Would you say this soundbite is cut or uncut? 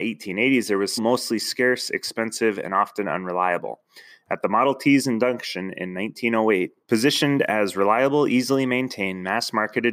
cut